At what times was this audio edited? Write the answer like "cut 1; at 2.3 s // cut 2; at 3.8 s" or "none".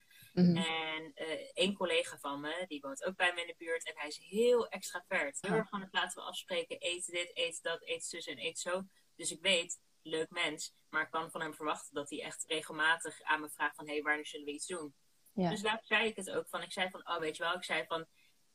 cut 1; at 5.4 s // cut 2; at 12.5 s // cut 3; at 17.2 s